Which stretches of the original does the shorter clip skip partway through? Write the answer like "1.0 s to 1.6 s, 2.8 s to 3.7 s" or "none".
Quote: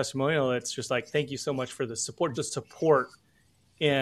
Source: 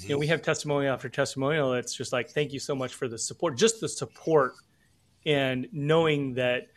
3.6 s to 3.8 s